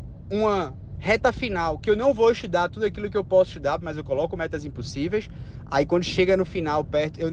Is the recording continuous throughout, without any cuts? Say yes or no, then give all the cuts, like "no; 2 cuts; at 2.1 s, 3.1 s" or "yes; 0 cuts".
yes; 0 cuts